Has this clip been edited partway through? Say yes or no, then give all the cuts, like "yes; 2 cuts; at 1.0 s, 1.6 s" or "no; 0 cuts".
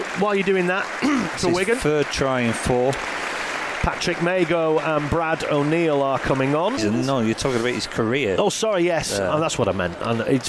yes; 2 cuts; at 1.4 s, 6.8 s